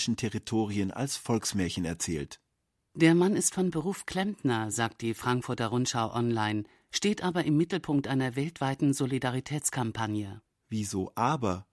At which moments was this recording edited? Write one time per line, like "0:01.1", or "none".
none